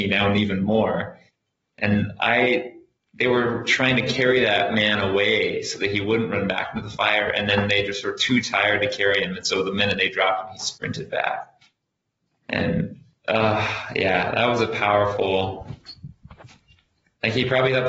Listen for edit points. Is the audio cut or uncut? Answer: uncut